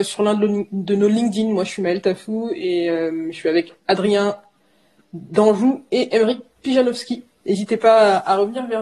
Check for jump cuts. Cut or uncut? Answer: uncut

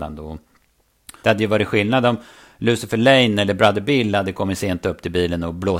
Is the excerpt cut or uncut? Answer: cut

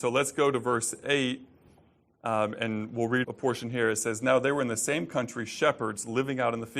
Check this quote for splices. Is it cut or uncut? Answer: cut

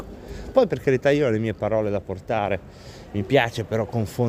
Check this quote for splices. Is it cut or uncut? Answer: uncut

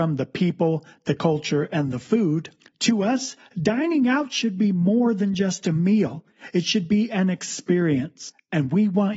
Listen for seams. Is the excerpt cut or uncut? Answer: uncut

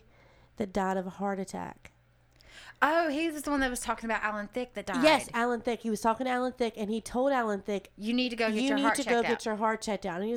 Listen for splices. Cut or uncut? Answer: uncut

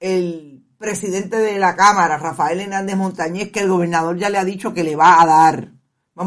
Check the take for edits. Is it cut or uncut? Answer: uncut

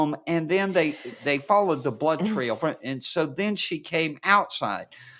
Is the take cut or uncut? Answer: uncut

